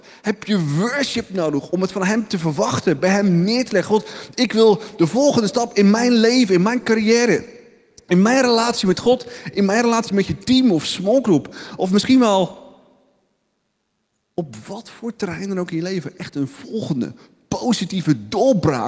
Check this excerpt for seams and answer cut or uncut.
uncut